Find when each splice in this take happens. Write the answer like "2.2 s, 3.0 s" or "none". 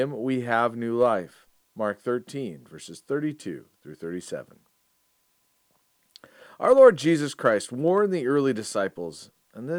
1.6 s